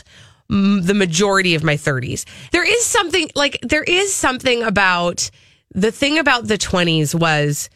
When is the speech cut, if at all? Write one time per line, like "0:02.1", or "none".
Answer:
0:02.5